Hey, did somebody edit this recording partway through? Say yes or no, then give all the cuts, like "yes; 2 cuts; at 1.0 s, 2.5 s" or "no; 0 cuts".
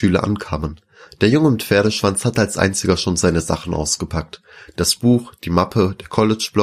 no; 0 cuts